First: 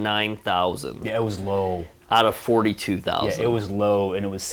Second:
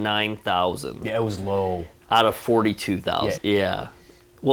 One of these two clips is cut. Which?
second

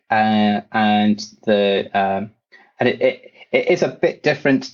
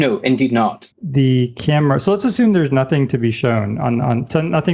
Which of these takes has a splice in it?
second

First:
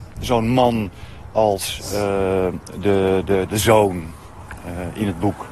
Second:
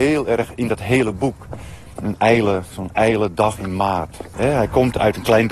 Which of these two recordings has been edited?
second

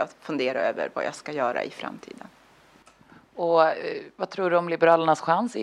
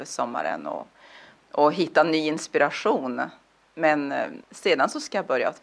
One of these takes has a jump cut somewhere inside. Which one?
second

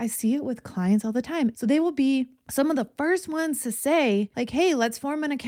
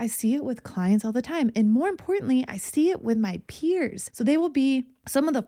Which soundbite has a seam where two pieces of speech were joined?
first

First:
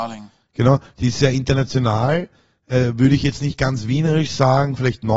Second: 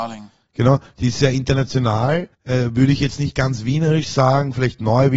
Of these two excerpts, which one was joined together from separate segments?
second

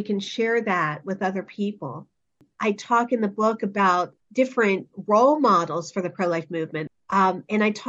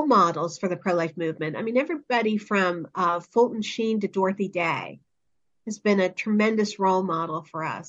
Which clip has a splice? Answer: first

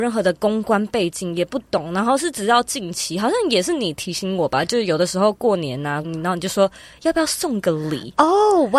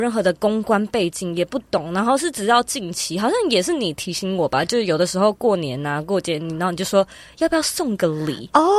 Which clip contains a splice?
first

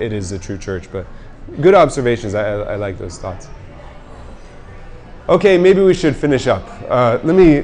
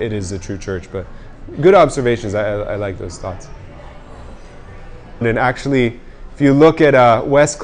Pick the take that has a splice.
second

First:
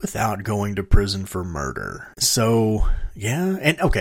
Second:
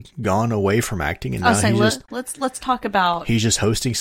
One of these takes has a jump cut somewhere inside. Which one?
first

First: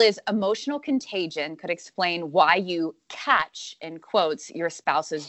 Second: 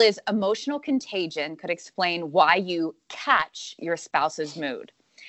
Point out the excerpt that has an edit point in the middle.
second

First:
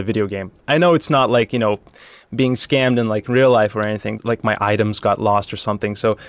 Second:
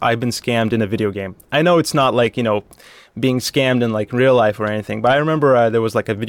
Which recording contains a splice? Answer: first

